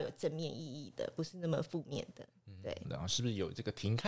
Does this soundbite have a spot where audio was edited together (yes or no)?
yes